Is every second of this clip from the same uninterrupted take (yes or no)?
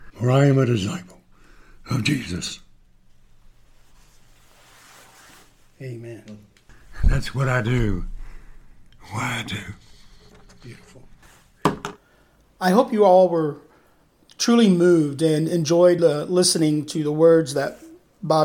yes